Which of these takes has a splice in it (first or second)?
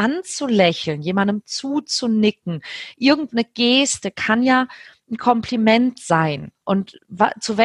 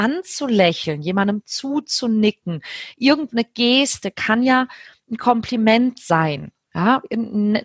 first